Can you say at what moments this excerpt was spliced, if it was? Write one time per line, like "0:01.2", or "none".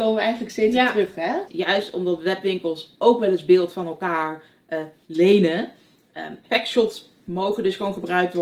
0:01.5
0:06.4